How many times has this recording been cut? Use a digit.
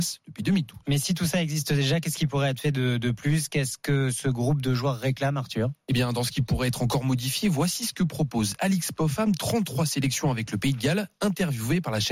0